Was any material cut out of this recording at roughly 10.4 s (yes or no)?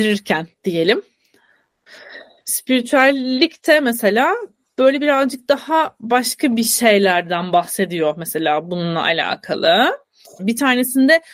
yes